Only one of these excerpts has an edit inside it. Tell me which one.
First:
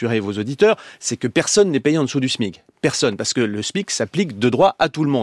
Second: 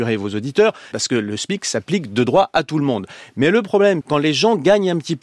second; 2 cuts; at 0.9 s, 4.0 s

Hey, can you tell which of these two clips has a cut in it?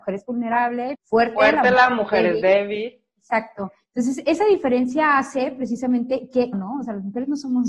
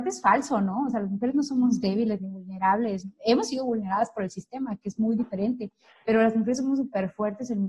first; 2 cuts; at 0.9 s, 6.5 s

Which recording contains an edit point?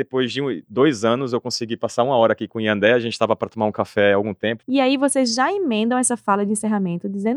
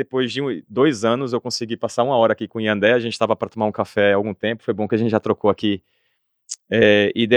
first; 1 cut; at 4.6 s

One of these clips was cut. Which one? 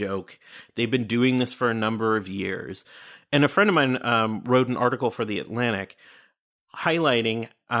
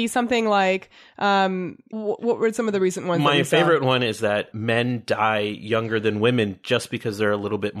second; 2 cuts; at 1.9 s, 4.5 s

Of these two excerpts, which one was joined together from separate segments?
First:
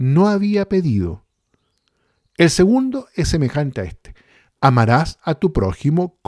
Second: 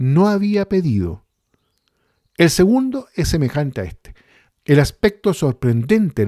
second; 1 cut; at 4.5 s

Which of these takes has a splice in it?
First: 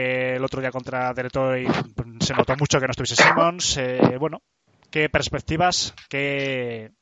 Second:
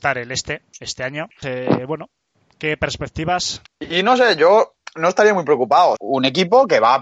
second; 3 cuts; at 1.4 s, 3.7 s, 6.0 s

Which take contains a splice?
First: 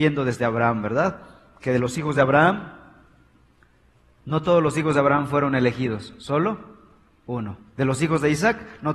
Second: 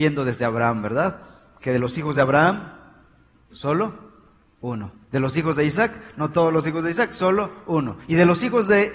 second; 1 cut; at 3.5 s

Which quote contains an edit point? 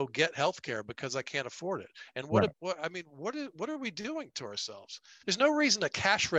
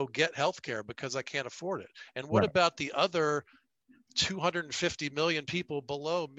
first; 2 cuts; at 2.5 s, 5.2 s

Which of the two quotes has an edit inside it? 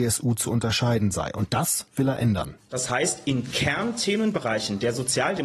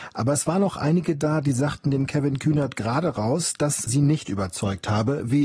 second; 1 cut; at 3.9 s

